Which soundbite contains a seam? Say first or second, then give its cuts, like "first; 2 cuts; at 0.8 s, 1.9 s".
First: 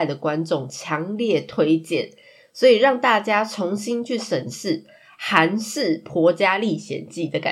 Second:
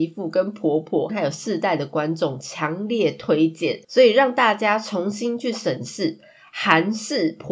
second; 2 cuts; at 1.1 s, 3.8 s